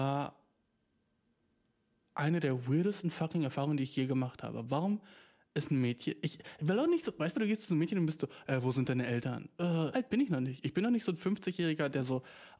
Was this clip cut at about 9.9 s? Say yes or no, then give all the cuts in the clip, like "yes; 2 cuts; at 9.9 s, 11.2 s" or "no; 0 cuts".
yes; 2 cuts; at 7.3 s, 9.9 s